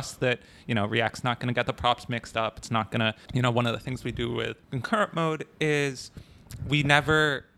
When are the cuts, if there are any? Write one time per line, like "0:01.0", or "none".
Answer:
0:03.3
0:04.6